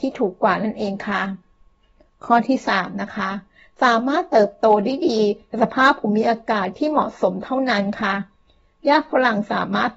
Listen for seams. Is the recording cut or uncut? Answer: uncut